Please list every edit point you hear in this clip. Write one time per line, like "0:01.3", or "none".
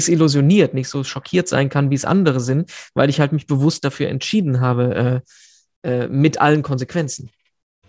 none